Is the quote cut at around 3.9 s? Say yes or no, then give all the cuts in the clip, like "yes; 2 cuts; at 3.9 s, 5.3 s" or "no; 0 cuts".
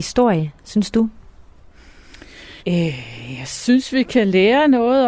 no; 1 cut; at 2.6 s